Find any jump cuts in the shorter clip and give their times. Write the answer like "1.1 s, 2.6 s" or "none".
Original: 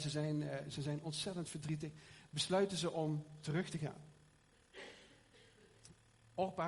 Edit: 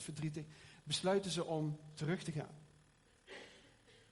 none